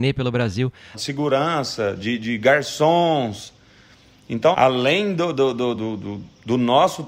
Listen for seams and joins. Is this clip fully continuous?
no; 3 cuts; at 0.9 s, 4.5 s, 5.8 s

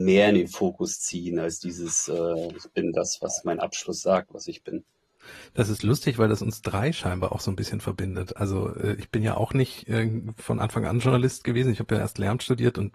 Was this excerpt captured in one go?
yes; 0 cuts

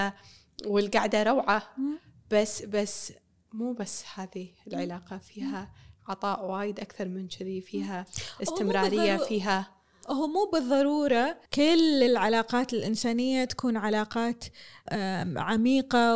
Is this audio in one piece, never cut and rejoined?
no; 2 cuts; at 11.5 s, 14.9 s

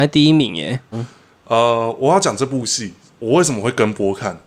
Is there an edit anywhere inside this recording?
yes; 1 cut; at 0.9 s

